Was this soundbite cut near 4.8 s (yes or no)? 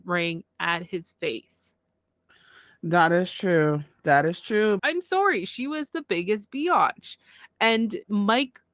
yes